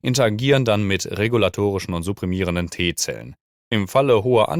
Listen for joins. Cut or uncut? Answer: cut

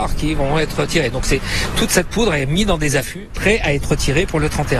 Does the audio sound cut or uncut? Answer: uncut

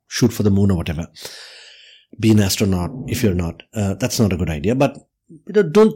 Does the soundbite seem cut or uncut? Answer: uncut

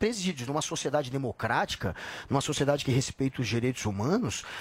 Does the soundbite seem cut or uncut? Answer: uncut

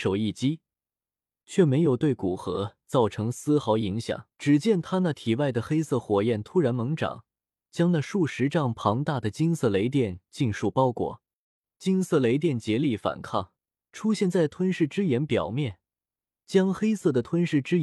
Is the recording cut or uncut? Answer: cut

